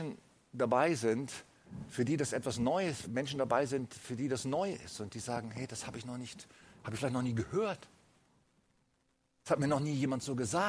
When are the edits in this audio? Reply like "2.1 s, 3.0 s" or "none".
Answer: 3.0 s